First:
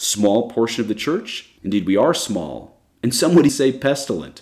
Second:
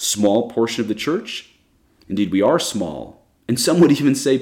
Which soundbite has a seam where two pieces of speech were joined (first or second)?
first